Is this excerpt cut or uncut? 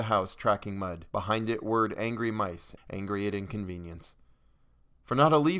cut